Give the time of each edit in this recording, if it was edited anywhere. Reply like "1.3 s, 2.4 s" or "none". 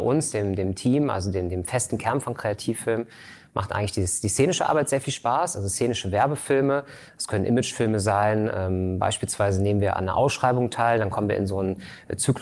none